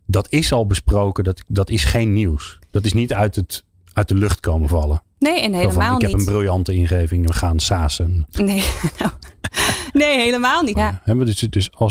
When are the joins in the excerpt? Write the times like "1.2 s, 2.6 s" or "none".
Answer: 10.7 s